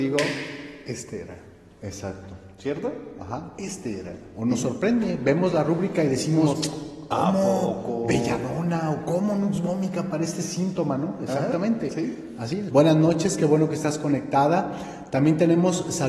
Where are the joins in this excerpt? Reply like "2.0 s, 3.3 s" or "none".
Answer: 12.7 s